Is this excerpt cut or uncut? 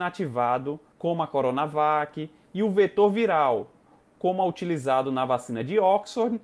cut